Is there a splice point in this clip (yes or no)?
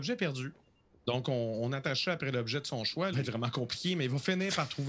yes